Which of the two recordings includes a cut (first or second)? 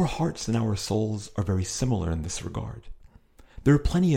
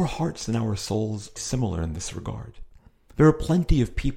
second